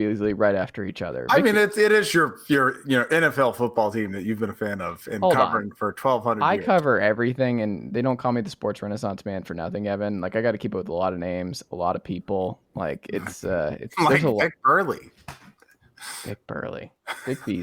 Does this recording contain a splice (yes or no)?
no